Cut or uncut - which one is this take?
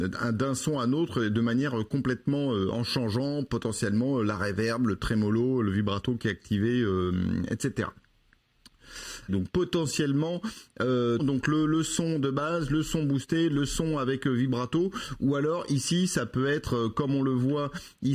cut